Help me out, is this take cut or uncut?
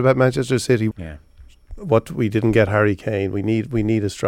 cut